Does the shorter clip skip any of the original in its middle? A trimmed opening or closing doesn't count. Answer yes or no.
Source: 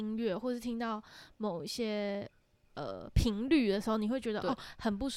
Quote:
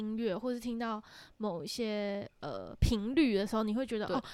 yes